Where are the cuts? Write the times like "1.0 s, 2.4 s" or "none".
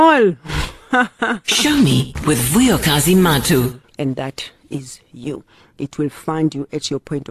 3.8 s, 5.6 s